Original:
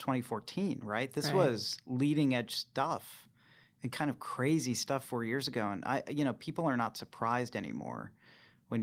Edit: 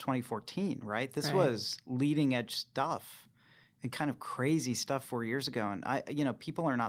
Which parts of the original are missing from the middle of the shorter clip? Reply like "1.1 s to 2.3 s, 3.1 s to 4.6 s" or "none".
none